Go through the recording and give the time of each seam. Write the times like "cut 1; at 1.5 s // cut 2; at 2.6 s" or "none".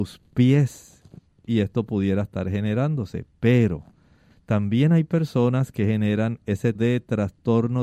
cut 1; at 6.7 s